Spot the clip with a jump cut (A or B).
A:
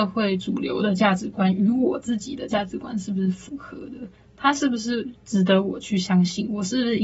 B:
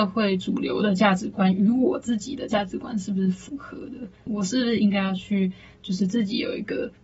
B